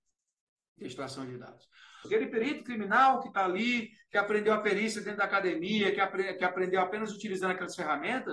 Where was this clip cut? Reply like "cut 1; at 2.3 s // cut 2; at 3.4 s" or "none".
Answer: cut 1; at 2.0 s